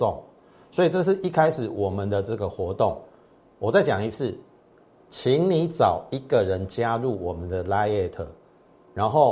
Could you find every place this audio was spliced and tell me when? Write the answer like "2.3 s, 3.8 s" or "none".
none